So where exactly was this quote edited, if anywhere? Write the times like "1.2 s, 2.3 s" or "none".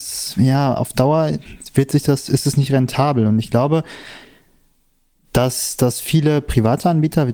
none